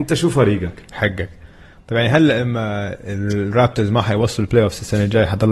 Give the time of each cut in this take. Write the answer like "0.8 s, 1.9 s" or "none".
0.9 s